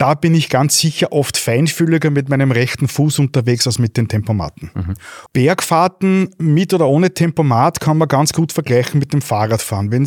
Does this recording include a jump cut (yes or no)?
yes